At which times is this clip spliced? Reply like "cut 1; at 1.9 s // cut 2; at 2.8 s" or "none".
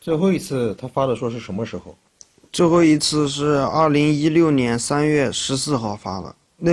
cut 1; at 1.2 s

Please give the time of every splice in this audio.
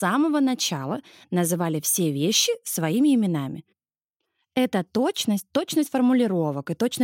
none

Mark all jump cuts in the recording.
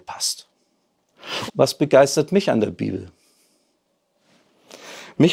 cut 1; at 1.5 s

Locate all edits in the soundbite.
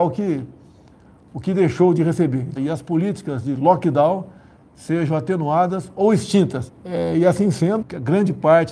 cut 1; at 2.6 s // cut 2; at 6.7 s // cut 3; at 7.8 s

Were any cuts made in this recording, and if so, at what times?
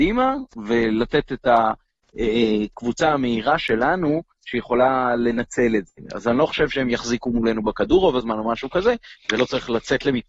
none

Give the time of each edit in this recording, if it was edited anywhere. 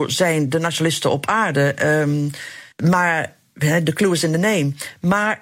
cut 1; at 2.7 s

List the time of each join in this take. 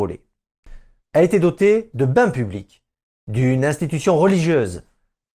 cut 1; at 1.0 s

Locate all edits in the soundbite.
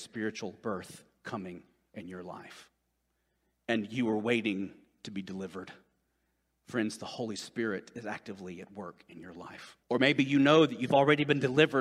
cut 1; at 9.8 s

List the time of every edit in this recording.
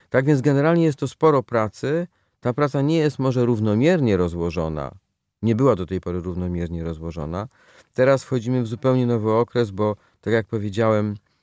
none

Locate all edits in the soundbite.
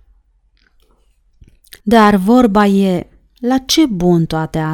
cut 1; at 1.8 s

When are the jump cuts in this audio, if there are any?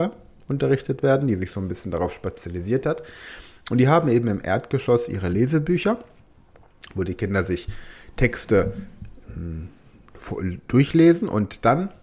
none

